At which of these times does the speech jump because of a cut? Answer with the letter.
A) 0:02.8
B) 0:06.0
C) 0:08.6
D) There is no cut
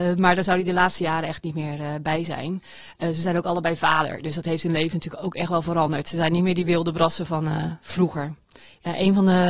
D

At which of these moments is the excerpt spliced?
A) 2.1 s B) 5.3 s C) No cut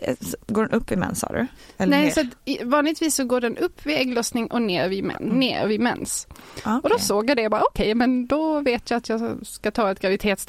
B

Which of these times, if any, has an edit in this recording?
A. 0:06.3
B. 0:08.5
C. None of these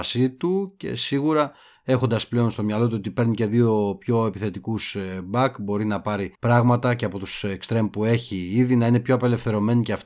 A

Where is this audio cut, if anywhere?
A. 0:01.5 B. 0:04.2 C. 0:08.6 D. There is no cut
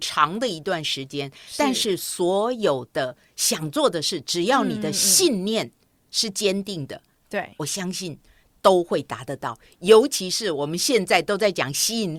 D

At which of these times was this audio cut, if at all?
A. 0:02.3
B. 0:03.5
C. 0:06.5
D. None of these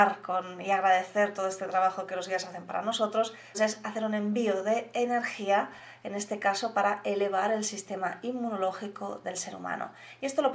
B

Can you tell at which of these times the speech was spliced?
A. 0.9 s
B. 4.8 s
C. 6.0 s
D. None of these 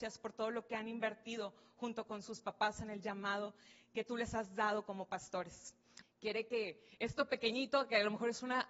C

